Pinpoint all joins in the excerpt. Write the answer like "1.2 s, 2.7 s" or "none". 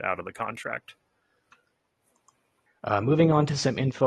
2.7 s